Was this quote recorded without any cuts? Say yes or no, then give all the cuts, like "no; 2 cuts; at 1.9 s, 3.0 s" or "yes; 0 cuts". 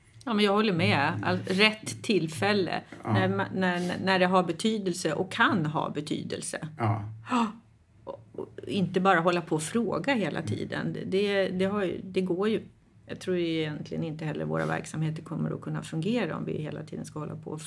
yes; 0 cuts